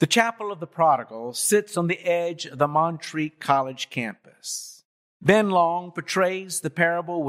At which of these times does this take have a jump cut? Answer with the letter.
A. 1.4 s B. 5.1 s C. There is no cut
B